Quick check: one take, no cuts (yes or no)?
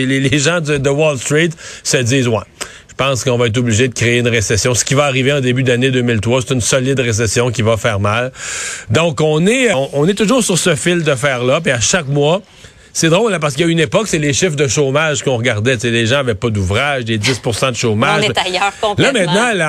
no